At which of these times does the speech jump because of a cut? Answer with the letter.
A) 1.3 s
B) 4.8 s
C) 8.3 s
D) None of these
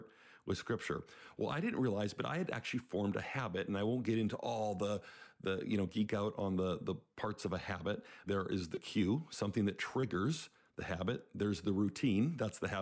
C